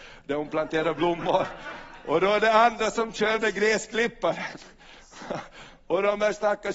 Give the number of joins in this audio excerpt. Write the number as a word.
zero